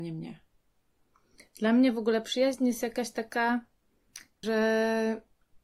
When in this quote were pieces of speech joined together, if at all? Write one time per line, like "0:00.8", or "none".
0:04.4